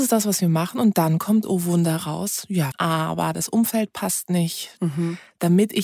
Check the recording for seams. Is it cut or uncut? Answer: cut